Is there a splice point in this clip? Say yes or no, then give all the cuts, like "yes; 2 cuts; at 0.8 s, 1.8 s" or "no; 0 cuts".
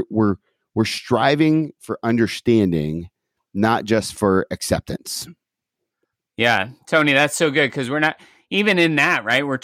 no; 0 cuts